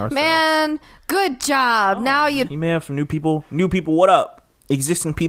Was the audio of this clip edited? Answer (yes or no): yes